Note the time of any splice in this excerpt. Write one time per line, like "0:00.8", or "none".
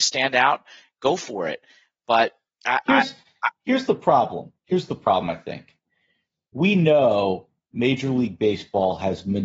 none